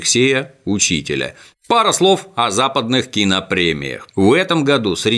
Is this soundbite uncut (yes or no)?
no